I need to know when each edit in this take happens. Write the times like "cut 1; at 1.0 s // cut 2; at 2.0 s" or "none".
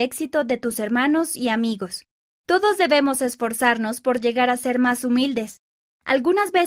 none